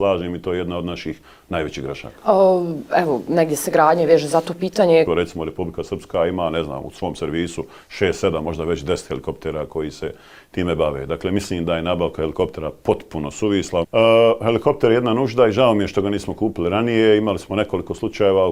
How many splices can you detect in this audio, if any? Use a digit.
2